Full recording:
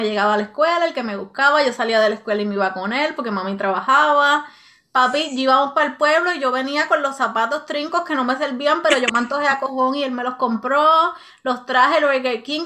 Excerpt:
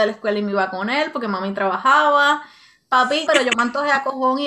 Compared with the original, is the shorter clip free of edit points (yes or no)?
no